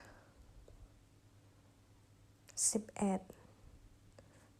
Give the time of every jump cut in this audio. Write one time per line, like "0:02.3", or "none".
none